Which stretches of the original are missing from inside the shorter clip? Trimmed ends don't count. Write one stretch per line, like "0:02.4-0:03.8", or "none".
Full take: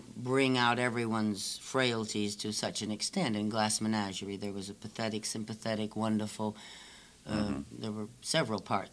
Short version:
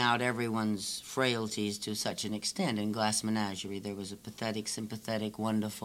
none